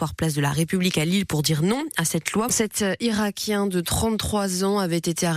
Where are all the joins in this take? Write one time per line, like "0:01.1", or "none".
0:02.5